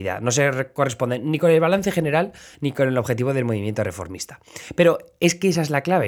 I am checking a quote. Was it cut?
no; 0 cuts

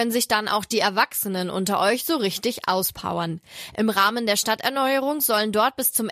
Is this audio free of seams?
yes; 0 cuts

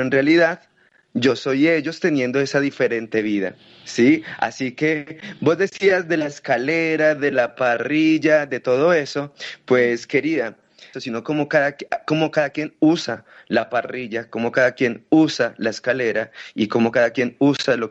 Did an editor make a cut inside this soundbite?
yes; 1 cut; at 10.9 s

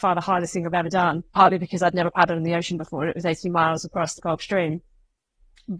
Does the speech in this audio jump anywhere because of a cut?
yes; 1 cut; at 1.3 s

